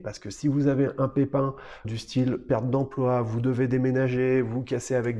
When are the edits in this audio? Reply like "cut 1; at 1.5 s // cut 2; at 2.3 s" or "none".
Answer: cut 1; at 1.8 s